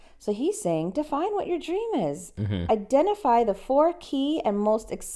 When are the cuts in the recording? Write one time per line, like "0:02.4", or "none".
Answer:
none